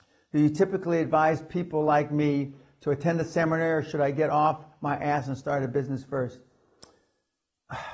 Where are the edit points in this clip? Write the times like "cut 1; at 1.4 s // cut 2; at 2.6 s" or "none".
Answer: none